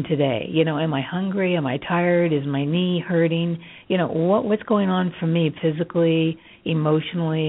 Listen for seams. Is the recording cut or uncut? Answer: uncut